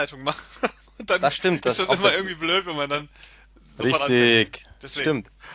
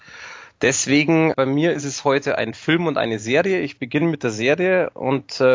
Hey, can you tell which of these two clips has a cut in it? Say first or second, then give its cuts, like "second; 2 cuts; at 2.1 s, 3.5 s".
second; 1 cut; at 1.3 s